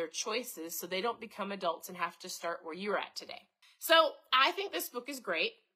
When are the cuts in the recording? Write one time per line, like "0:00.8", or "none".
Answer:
0:03.6